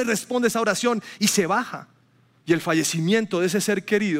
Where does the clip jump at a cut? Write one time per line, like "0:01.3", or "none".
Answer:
0:02.4